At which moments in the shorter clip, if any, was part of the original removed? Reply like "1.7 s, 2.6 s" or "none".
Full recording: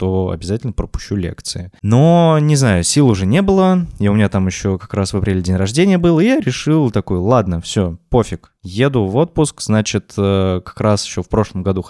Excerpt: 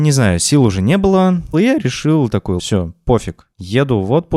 1.5 s, 2.6 s